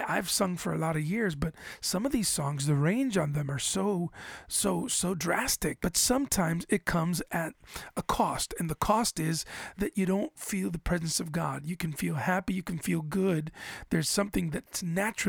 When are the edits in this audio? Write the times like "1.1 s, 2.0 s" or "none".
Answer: 5.8 s, 9.7 s